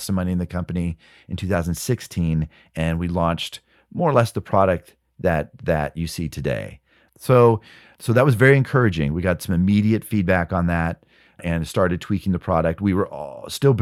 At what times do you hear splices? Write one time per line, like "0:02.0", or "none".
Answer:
0:07.1